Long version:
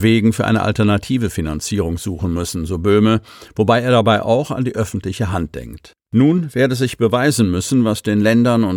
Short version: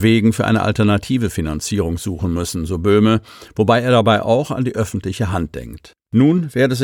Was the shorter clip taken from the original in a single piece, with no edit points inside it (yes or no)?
yes